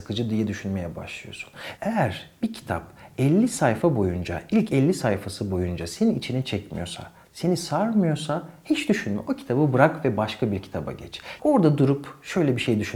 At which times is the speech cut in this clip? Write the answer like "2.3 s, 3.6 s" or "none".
1.8 s, 11.4 s